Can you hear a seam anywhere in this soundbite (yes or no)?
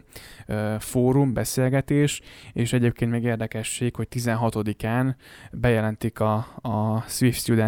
no